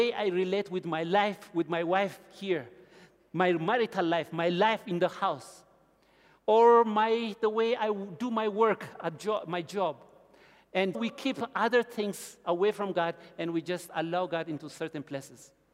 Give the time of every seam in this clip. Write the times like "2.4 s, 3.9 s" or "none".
10.9 s